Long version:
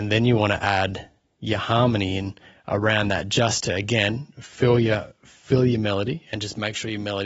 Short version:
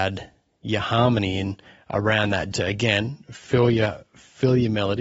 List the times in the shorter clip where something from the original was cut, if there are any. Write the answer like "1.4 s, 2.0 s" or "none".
2.5 s